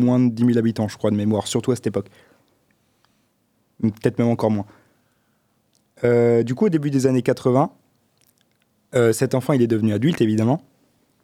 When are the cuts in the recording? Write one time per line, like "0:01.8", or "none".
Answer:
none